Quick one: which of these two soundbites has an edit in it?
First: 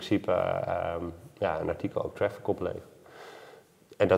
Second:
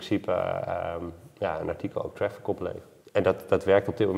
second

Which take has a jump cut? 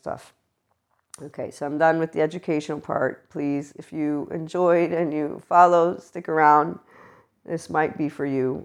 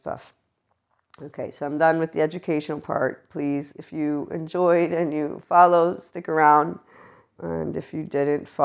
second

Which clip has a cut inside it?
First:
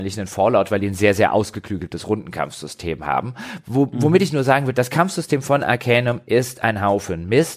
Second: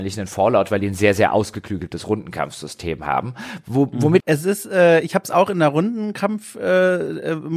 second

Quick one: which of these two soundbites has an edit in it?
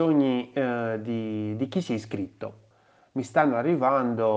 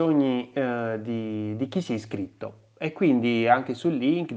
first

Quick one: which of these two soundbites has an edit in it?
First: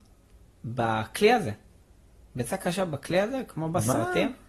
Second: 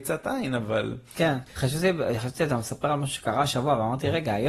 second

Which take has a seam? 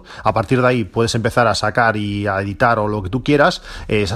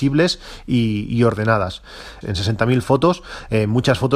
second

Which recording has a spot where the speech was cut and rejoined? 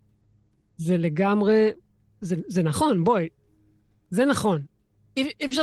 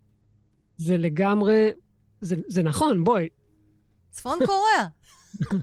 second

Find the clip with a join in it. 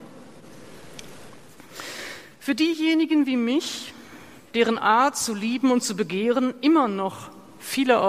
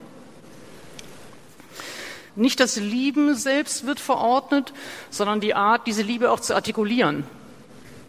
second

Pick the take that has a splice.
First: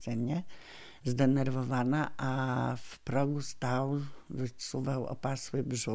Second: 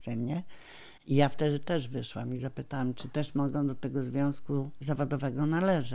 second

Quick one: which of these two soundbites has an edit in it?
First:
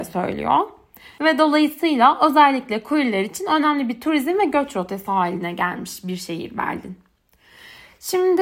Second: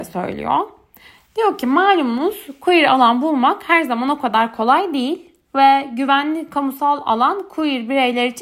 first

